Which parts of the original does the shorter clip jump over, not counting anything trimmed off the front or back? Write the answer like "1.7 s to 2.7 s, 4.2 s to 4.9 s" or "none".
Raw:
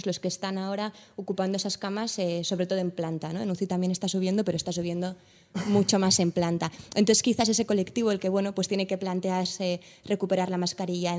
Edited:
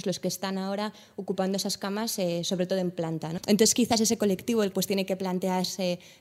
3.4 s to 6.9 s, 8.2 s to 8.5 s

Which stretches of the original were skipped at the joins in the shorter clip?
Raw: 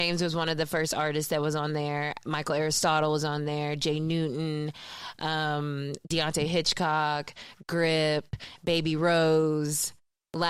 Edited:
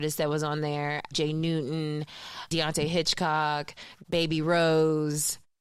2.2 s to 3.8 s, 5.2 s to 6.1 s, 7.6 s to 8.6 s

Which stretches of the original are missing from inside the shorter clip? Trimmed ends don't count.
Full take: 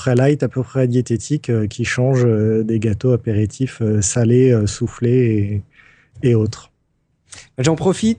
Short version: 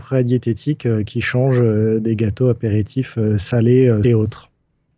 4.7 s to 6.2 s

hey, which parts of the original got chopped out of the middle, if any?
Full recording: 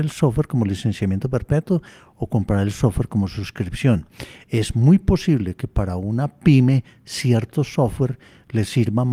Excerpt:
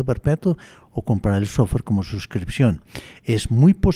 none

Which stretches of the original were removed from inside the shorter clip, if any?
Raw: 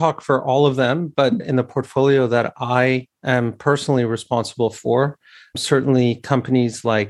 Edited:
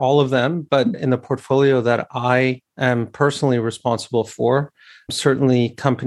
none

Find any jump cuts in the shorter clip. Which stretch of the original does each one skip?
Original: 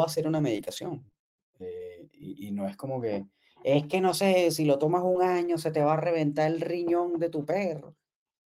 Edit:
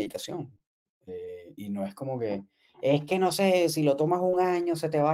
2.1 s to 2.4 s

